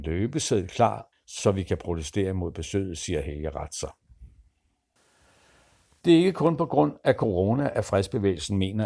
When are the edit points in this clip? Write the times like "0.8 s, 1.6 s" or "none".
1.1 s